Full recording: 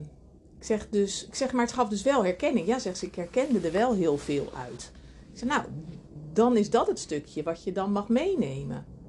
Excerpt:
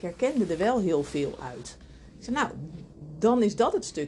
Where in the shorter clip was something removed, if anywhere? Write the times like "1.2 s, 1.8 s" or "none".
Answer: none